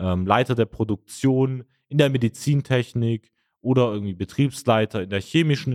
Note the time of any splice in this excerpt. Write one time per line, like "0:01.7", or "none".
none